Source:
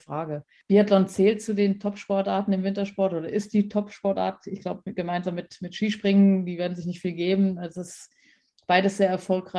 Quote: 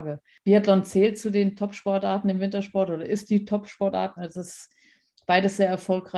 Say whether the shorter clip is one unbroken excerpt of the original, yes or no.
no